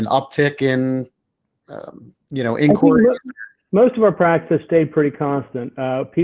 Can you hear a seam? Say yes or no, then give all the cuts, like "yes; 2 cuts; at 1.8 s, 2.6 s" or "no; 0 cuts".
yes; 1 cut; at 2.2 s